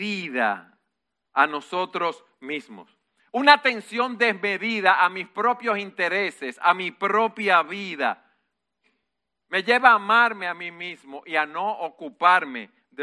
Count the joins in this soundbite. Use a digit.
0